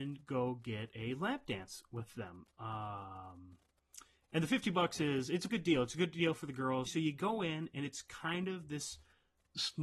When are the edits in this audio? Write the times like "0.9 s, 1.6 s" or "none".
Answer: 5.5 s, 6.9 s